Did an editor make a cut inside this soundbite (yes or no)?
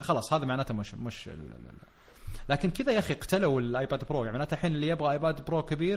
no